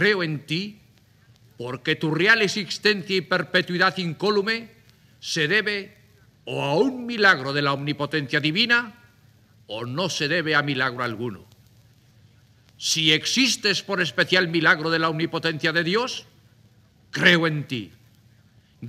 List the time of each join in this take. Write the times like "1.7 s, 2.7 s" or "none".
none